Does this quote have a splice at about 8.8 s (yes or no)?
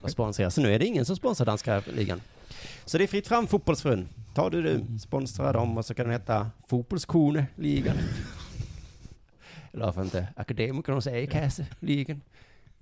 no